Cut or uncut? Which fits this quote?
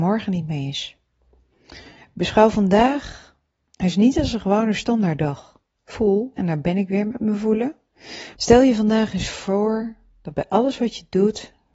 cut